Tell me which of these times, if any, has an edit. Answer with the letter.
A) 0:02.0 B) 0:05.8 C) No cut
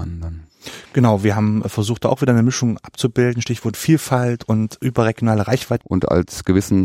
B